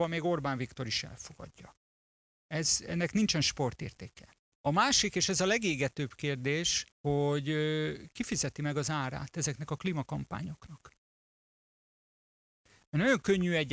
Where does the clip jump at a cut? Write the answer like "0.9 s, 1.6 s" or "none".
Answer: 4.5 s, 6.9 s